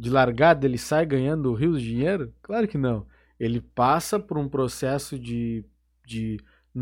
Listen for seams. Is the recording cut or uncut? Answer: uncut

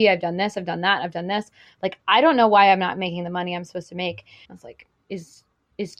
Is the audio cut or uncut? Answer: cut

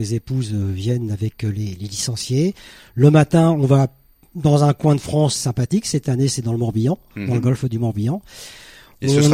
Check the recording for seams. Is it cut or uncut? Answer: uncut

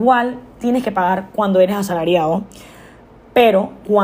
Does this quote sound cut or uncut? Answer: uncut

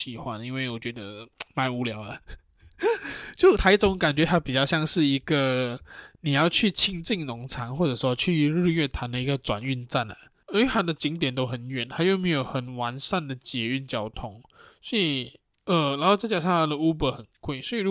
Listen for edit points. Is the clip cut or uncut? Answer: cut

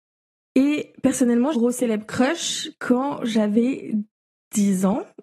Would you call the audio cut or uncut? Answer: cut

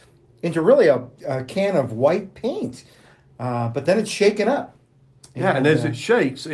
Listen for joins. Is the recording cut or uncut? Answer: cut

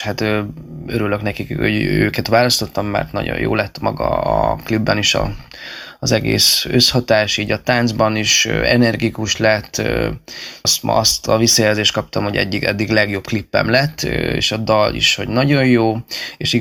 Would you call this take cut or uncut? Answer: cut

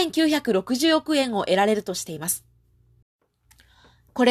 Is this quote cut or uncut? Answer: uncut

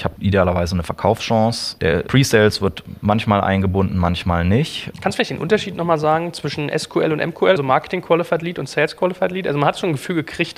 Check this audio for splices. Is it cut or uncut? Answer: cut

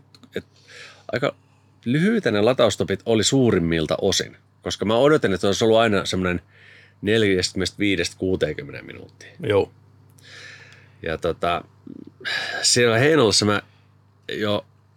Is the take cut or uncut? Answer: uncut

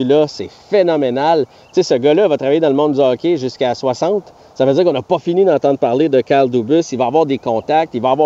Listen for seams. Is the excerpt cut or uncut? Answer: uncut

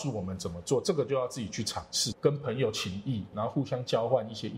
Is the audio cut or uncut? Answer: cut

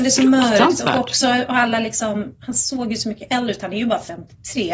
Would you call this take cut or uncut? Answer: uncut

